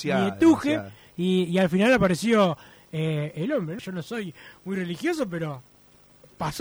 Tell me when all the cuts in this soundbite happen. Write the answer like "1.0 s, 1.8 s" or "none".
3.8 s